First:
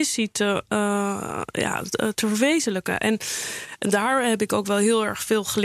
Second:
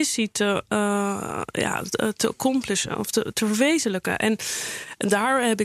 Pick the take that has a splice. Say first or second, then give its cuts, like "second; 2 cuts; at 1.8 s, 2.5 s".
first; 1 cut; at 2.1 s